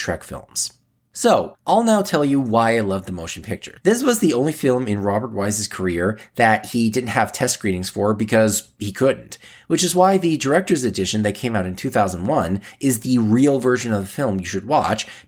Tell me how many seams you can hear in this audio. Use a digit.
2